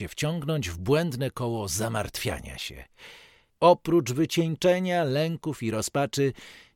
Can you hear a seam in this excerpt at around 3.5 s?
yes; 1 cut; at 3.5 s

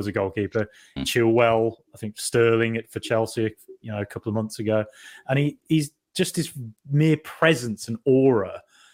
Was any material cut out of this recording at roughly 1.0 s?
yes; 1 cut; at 1.0 s

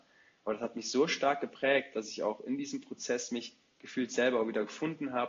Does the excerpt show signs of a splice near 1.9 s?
no; 0 cuts

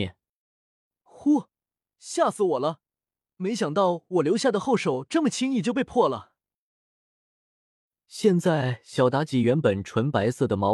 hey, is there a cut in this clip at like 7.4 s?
yes; 1 cut; at 7.4 s

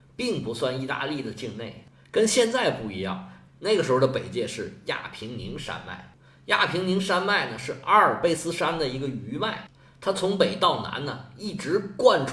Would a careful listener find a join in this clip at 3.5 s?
yes; 1 cut; at 3.5 s

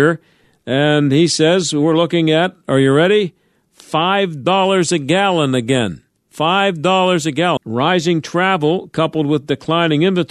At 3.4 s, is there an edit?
no; 1 cut; at 7.6 s

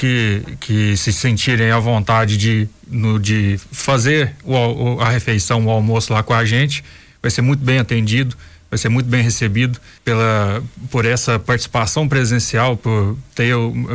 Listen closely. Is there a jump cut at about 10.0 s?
yes; 1 cut; at 10.0 s

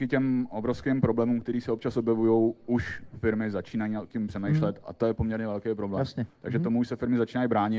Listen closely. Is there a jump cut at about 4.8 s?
yes; 1 cut; at 4.8 s

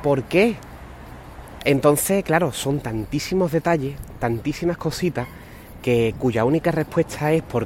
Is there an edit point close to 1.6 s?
yes; 1 cut; at 1.6 s

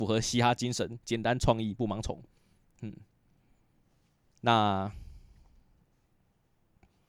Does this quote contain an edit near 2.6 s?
no; 0 cuts

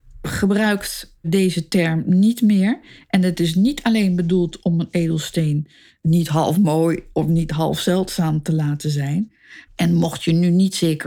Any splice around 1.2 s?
yes; 2 cuts; at 1.2 s, 9.7 s

